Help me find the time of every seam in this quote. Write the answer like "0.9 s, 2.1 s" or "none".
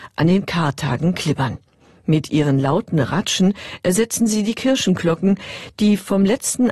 none